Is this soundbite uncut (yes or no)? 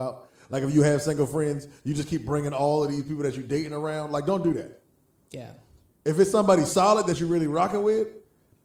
yes